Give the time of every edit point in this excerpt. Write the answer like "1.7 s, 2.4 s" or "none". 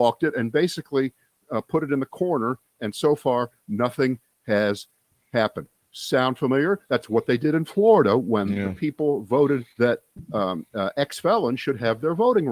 9.7 s